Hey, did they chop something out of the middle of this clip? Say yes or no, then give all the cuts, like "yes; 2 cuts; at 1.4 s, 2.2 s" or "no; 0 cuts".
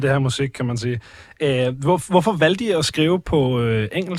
no; 0 cuts